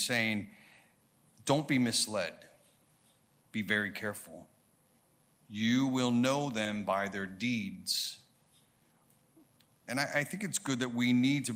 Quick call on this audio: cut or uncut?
cut